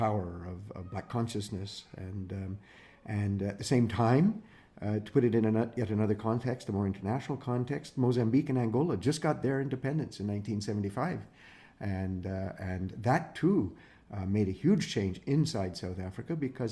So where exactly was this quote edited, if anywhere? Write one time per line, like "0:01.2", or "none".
none